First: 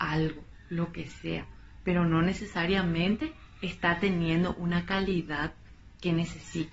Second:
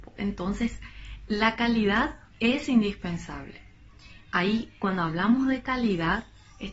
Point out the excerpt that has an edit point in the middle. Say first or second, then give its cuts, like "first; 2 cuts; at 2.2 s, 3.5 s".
second; 1 cut; at 2.3 s